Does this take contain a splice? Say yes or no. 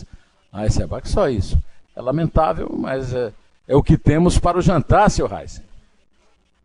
yes